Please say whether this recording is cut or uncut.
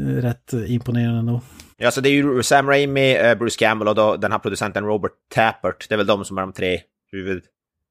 cut